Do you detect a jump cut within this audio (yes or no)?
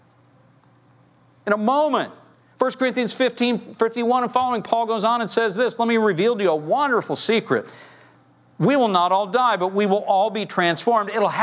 yes